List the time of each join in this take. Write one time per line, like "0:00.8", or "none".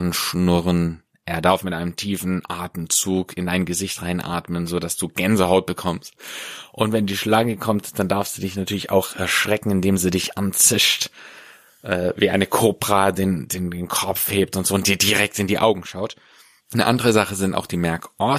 0:16.6